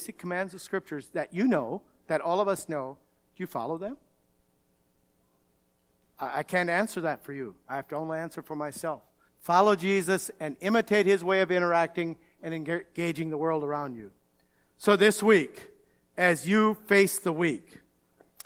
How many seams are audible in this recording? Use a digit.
1